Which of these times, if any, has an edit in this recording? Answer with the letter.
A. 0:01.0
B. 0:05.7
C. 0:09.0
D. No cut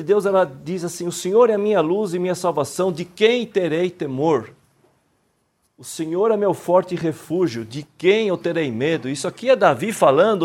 D